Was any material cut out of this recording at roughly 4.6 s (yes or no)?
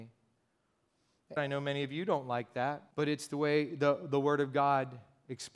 no